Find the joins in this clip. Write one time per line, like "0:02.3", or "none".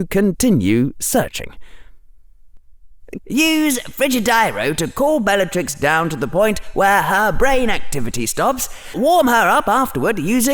0:03.2
0:08.9

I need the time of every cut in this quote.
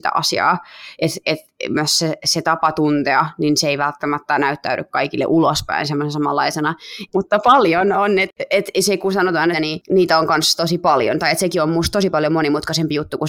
0:07.1
0:09.5

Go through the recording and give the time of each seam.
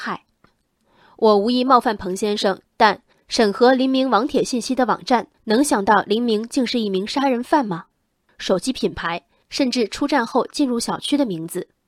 0:02.6
0:05.3
0:08.3

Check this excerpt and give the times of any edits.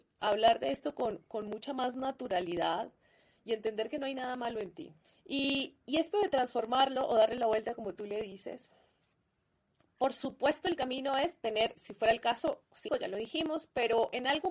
0:11.8
0:12.9

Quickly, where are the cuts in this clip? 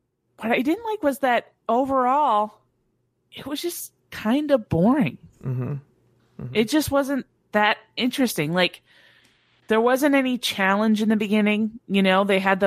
none

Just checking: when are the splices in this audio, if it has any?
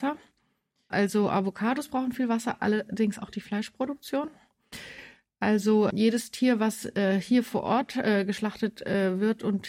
0:00.9
0:05.9

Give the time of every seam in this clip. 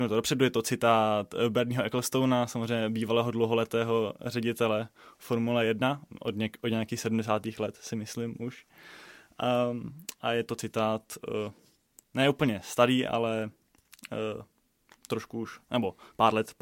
none

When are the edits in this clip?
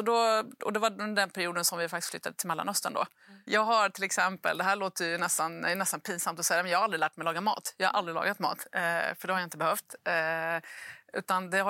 0:03.5

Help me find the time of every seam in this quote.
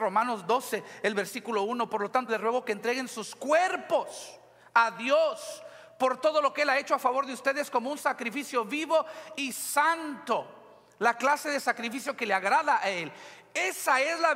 0:02.3

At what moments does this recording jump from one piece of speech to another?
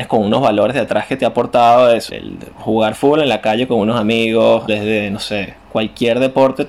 0:02.1
0:04.7

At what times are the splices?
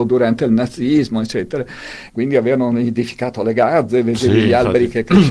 0:02.1

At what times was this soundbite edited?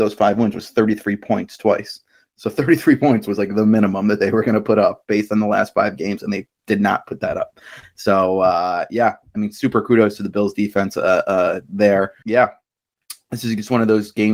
0:12.2

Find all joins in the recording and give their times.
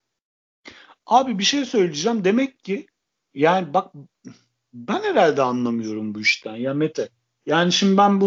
none

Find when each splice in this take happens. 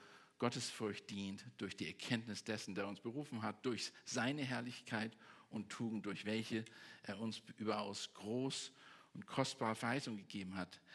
none

